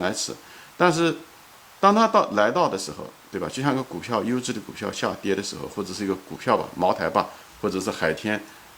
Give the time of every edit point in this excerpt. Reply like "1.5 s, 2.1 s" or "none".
none